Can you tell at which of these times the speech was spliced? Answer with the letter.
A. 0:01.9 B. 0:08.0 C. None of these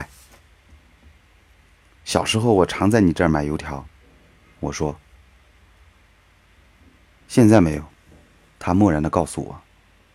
C